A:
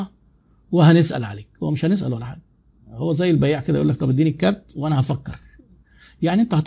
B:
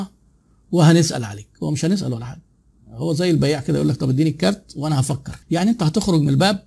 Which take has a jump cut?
B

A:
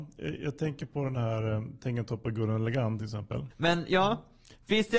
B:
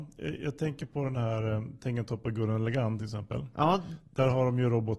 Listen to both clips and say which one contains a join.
A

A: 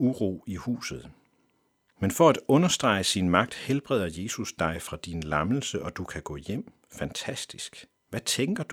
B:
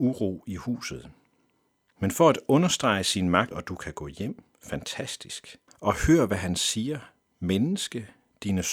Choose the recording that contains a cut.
B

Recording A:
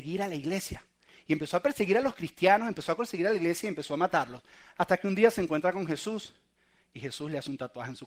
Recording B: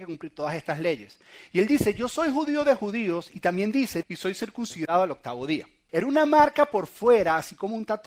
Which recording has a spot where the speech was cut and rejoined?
B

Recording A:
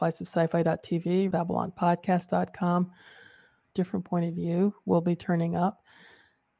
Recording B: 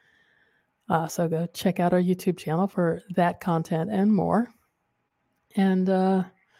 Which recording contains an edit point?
A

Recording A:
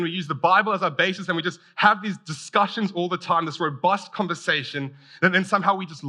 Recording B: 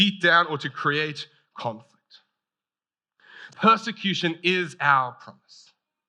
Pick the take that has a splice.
B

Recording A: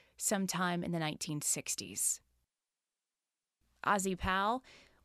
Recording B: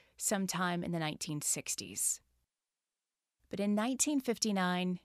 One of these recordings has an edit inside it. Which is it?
B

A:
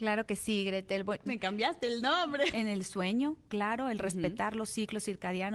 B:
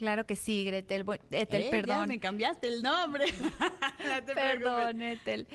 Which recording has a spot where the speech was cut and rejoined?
A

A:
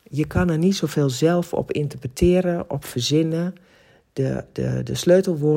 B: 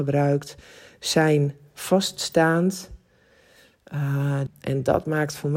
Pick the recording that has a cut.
B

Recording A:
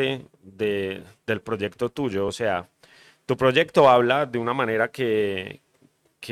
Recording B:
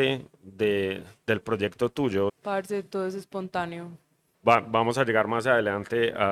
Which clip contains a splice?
B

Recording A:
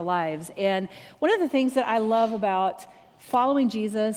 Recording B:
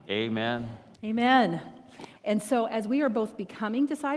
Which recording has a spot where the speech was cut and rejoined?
B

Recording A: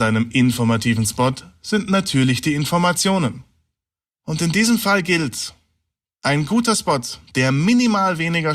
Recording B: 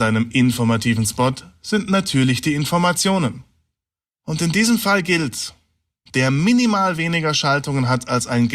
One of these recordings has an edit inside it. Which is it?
B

